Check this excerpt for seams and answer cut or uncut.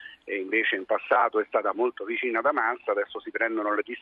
cut